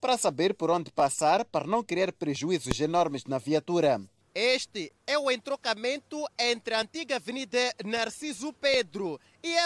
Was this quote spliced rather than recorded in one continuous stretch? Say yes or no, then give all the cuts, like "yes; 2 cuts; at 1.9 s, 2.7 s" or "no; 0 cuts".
no; 0 cuts